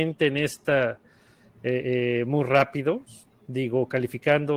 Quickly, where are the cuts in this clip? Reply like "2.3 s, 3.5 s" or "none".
3.3 s